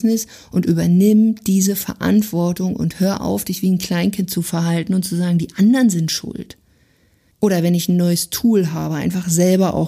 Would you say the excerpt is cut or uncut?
cut